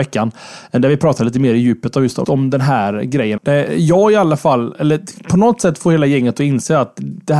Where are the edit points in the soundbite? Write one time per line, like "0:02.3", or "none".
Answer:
0:02.2
0:03.4

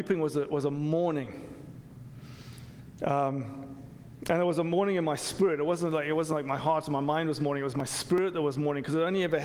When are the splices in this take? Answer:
none

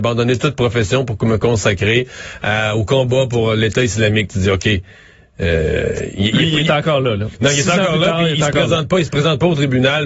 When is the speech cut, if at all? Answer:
none

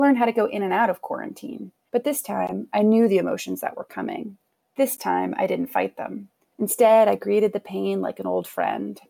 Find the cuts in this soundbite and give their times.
0:01.9

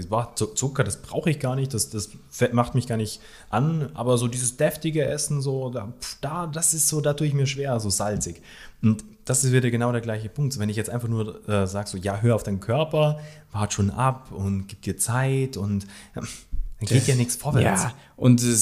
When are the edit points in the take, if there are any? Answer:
none

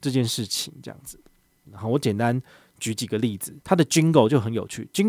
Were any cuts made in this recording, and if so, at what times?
0:01.6
0:03.6

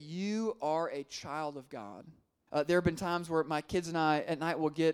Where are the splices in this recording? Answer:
0:02.5

